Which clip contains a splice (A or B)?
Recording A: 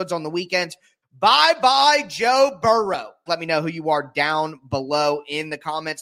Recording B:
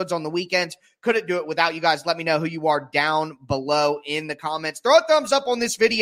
A